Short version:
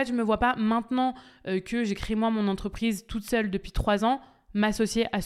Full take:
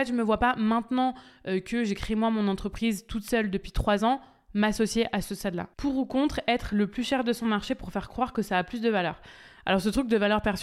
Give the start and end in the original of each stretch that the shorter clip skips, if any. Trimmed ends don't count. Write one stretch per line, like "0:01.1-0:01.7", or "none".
none